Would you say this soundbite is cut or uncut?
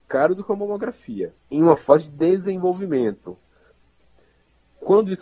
cut